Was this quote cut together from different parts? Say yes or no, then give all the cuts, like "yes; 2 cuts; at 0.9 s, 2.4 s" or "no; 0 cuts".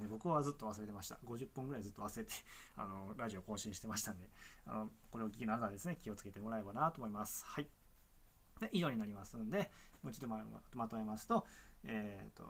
no; 0 cuts